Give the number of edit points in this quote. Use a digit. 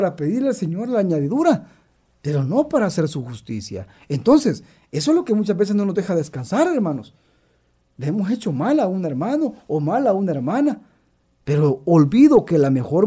1